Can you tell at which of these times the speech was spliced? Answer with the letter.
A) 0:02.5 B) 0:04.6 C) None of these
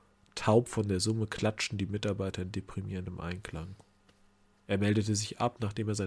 B